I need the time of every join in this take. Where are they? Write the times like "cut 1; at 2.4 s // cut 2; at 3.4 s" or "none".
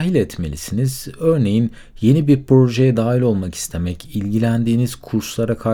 none